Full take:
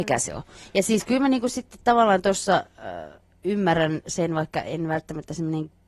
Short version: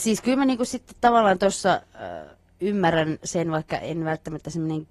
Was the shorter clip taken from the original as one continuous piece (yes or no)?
yes